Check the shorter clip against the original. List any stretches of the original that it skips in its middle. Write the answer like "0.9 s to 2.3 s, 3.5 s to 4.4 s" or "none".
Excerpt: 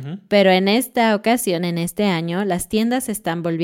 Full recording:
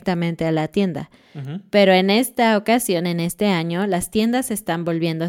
none